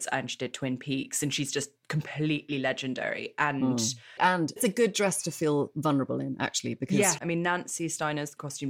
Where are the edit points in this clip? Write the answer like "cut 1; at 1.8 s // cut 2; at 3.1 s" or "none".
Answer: cut 1; at 4.2 s // cut 2; at 7.2 s